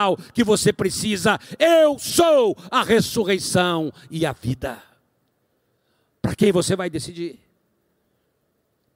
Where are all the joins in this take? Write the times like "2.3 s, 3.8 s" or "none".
none